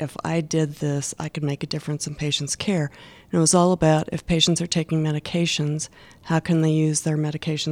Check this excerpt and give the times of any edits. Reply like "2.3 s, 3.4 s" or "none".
none